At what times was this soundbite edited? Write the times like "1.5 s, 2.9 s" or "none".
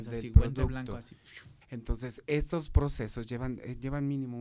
1.6 s